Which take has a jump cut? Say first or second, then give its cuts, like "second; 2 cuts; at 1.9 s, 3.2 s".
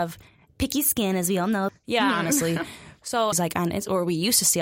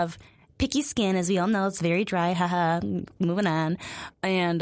first; 2 cuts; at 1.7 s, 3.3 s